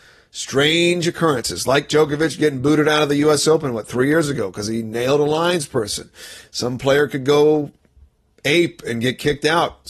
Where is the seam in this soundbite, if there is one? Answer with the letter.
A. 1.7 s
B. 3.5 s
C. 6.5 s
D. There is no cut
D